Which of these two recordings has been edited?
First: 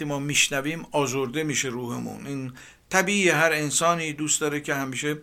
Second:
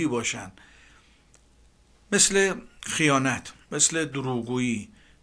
second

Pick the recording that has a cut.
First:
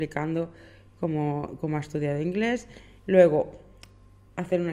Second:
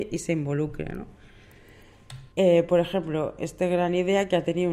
second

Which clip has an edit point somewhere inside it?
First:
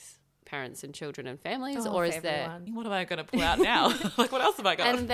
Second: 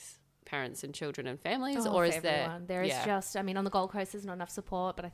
first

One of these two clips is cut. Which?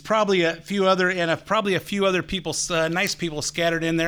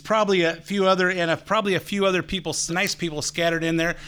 second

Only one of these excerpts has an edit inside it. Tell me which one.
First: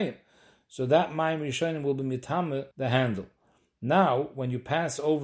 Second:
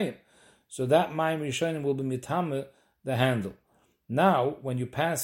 first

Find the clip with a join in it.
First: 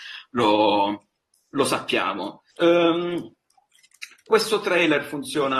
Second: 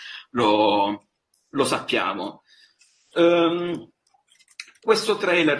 first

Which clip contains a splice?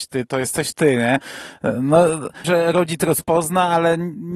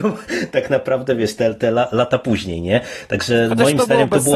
first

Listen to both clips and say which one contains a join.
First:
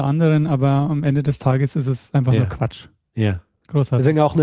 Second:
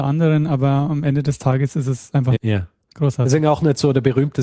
second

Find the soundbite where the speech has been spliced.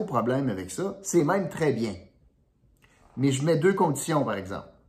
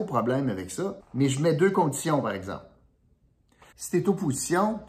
second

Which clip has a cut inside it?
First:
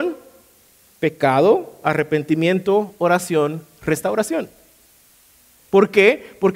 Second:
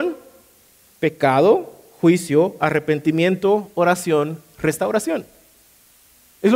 first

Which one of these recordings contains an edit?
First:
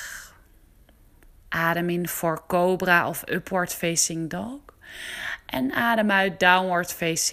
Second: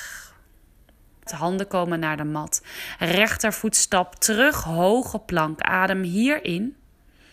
second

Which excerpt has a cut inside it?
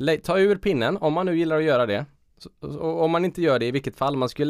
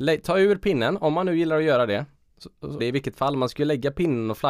second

